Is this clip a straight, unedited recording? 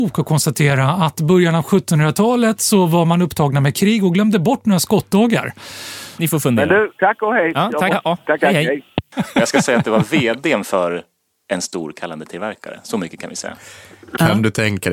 no; 2 cuts; at 6.2 s, 7.9 s

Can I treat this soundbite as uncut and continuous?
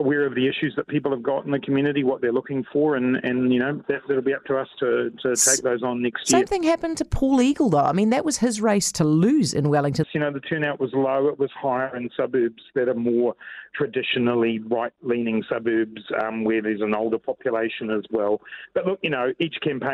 no; 1 cut; at 10.0 s

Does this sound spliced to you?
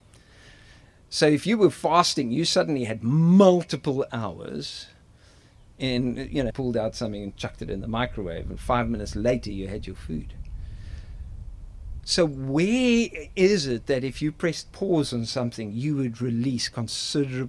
yes; 1 cut; at 6.5 s

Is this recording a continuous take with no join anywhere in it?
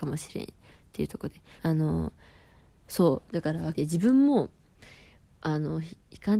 no; 2 cuts; at 1.6 s, 3.7 s

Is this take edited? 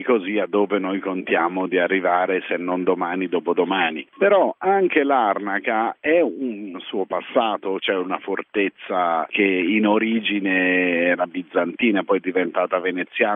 yes; 2 cuts; at 4.1 s, 6.7 s

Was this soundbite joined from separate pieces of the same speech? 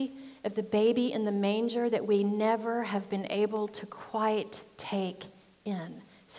no; 0 cuts

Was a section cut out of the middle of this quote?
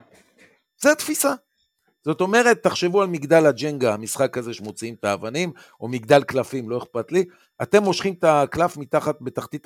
no; 0 cuts

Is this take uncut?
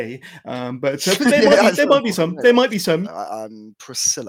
no; 1 cut; at 3.0 s

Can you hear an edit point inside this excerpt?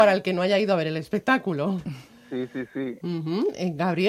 yes; 1 cut; at 3.0 s

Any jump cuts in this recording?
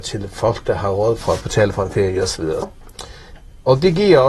yes; 1 cut; at 2.6 s

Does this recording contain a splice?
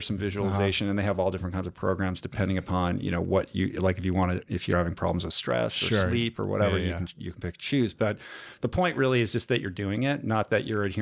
no; 0 cuts

